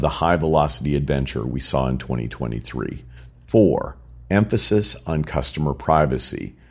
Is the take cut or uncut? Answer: cut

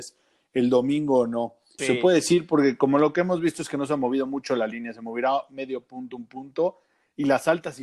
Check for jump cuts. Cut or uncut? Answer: cut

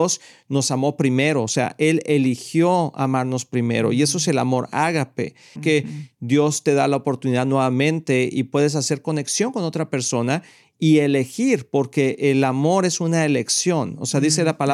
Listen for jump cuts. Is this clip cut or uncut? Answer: cut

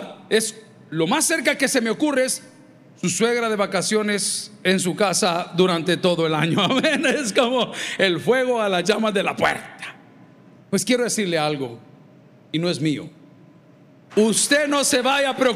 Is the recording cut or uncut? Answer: cut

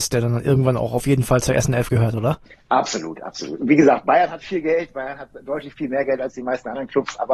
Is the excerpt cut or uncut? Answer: uncut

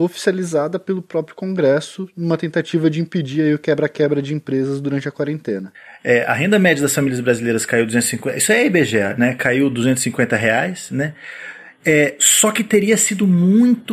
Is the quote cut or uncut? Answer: uncut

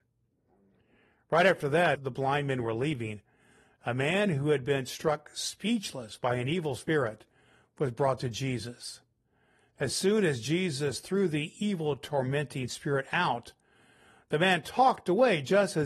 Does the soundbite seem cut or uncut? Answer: cut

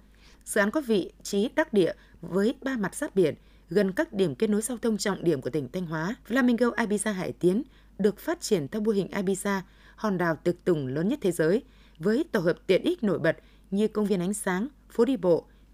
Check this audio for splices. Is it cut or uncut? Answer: cut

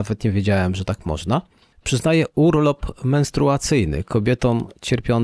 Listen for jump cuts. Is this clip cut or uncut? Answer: uncut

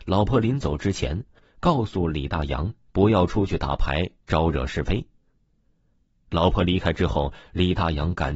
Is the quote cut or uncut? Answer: cut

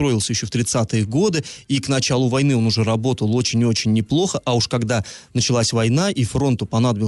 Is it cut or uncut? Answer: uncut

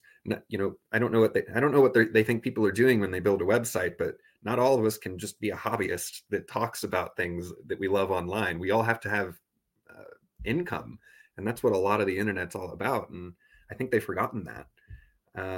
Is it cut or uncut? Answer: uncut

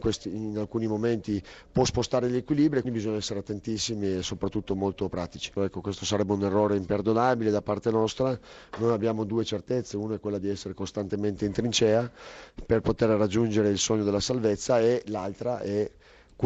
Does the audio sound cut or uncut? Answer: cut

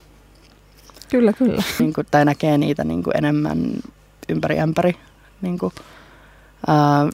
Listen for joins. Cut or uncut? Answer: cut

